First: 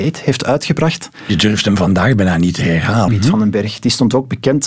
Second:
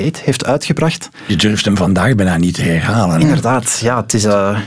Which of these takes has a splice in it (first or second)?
first